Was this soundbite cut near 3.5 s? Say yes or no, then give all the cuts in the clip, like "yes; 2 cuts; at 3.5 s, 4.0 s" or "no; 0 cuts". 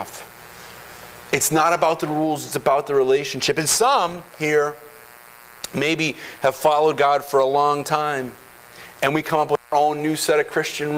no; 0 cuts